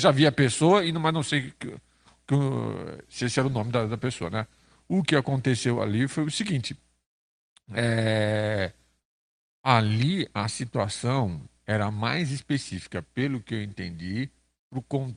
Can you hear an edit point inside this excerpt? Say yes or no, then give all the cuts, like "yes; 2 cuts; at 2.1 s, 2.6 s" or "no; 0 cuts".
no; 0 cuts